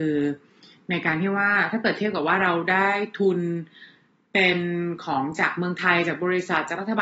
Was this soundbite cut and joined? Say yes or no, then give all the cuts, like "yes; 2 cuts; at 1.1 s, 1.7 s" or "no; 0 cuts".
no; 0 cuts